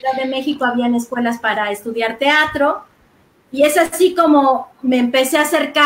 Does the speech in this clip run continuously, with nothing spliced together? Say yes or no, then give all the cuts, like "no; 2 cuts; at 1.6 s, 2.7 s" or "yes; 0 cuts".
yes; 0 cuts